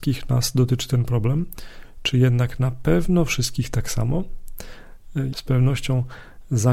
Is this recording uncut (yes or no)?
no